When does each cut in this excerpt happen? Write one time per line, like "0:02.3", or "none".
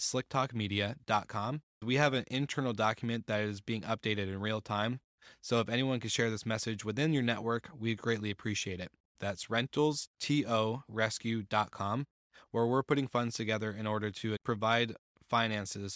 0:09.2
0:14.4